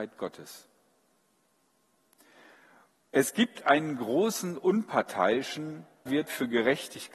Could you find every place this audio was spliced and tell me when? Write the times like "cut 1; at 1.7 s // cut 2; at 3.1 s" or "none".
cut 1; at 6.1 s